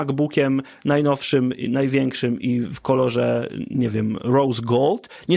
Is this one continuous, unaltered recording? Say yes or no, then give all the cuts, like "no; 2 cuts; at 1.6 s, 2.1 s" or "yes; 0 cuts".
yes; 0 cuts